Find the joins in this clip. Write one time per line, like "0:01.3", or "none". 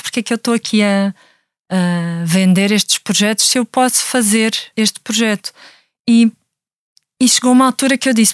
0:04.7